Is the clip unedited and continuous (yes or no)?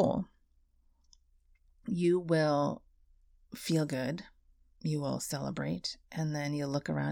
yes